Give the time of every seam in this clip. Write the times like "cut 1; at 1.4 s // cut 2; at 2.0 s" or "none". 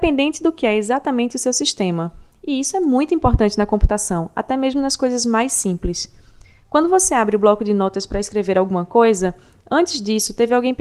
none